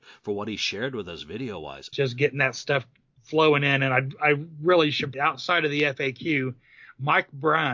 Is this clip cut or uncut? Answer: cut